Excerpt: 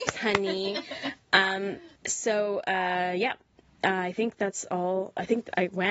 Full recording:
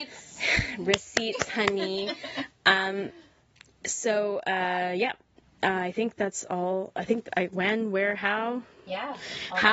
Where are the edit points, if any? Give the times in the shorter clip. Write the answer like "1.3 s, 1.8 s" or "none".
2.0 s